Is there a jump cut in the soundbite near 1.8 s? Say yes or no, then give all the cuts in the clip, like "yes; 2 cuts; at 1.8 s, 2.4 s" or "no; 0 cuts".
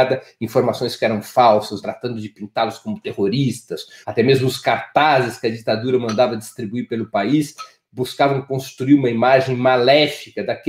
yes; 2 cuts; at 1.8 s, 4.0 s